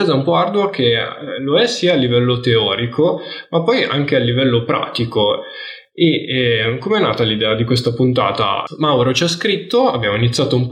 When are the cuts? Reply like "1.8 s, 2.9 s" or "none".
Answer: none